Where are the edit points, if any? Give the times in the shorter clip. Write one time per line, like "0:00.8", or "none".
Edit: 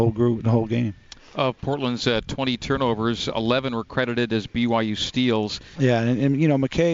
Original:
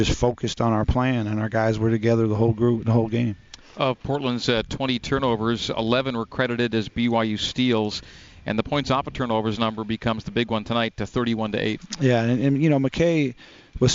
0:05.7